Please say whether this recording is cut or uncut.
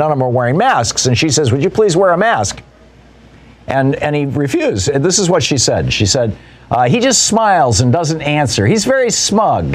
uncut